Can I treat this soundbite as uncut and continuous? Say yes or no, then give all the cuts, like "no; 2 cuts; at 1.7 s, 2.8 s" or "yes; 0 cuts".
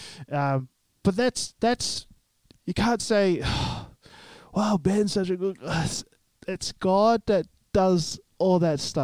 yes; 0 cuts